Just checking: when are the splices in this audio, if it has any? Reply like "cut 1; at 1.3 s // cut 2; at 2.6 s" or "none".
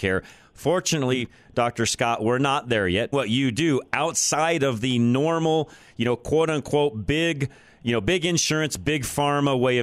cut 1; at 3.1 s